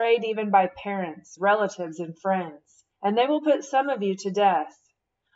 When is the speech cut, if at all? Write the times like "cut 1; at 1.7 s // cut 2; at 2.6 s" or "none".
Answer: cut 1; at 1.4 s // cut 2; at 2.9 s